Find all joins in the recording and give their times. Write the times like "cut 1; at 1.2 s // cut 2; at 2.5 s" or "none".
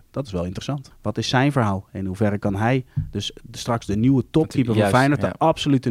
cut 1; at 0.9 s